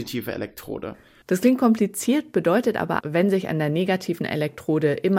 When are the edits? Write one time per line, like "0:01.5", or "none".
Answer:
0:03.0